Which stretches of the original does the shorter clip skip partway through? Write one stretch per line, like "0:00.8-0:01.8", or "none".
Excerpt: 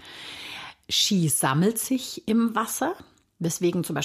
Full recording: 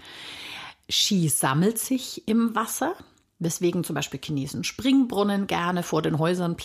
none